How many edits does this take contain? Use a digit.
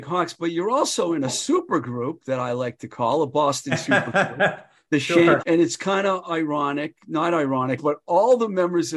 2